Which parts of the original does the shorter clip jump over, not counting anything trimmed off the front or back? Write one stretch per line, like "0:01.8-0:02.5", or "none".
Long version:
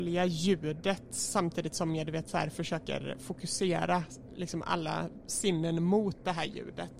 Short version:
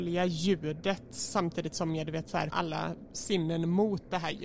0:02.5-0:04.6